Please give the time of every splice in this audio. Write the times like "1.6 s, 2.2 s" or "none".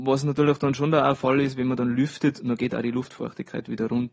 none